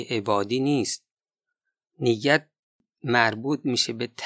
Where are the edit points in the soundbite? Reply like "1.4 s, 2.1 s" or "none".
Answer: none